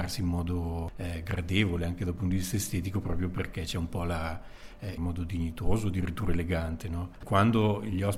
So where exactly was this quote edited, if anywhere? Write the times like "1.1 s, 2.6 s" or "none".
5.0 s, 7.2 s